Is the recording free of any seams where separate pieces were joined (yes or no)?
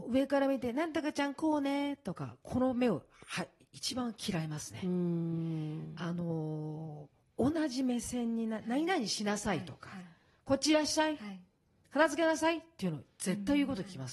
yes